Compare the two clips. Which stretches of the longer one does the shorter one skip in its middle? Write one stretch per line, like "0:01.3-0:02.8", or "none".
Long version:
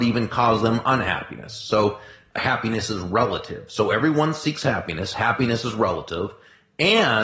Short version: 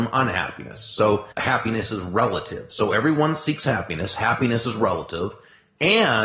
0:02.0-0:02.3